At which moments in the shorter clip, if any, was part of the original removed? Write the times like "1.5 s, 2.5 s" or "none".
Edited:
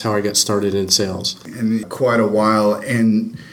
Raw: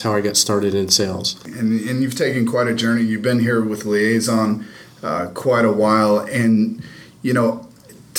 1.8 s

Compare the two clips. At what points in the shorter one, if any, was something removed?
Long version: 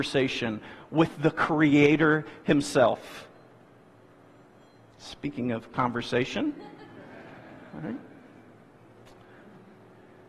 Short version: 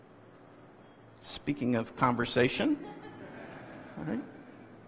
none

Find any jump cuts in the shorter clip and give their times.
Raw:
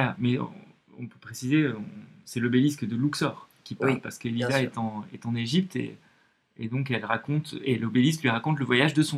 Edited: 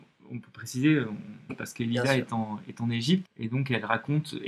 1.5 s, 3.2 s

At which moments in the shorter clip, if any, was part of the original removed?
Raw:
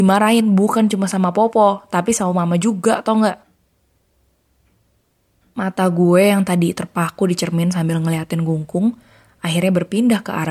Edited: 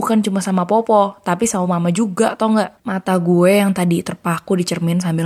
2.8 s

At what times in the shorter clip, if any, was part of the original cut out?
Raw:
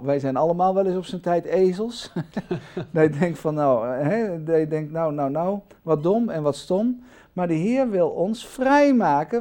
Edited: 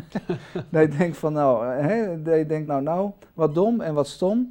2.7 s

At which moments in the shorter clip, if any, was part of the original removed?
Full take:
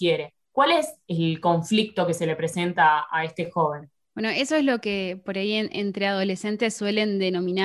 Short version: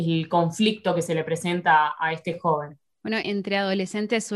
3.2 s

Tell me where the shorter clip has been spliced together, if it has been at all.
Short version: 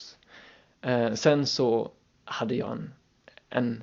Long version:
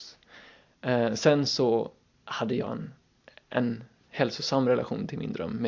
none

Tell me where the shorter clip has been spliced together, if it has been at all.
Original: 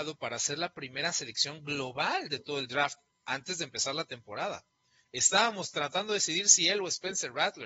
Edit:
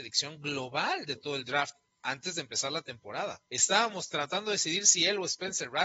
3.5 s

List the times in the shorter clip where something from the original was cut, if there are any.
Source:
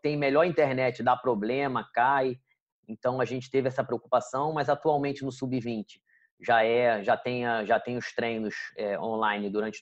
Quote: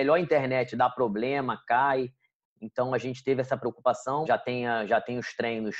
4.3 s

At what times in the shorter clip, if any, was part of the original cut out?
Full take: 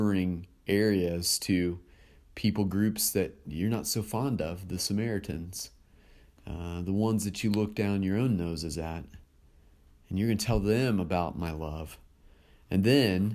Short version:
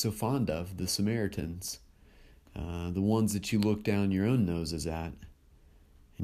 none

